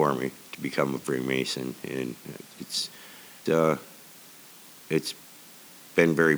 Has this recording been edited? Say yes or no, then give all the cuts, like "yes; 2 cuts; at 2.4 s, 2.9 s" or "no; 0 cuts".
yes; 1 cut; at 3.5 s